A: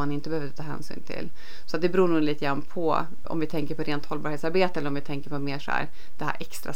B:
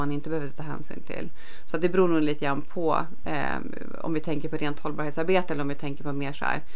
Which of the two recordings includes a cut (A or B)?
A